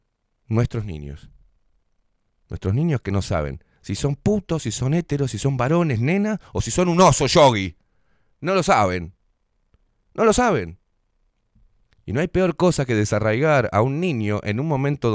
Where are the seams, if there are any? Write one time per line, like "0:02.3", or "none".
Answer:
none